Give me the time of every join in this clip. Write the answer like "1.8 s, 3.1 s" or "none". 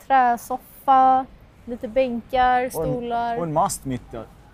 none